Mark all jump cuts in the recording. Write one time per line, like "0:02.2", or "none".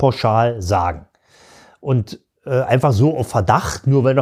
none